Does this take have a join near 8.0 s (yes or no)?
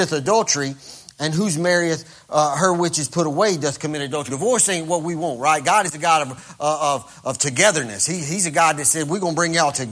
no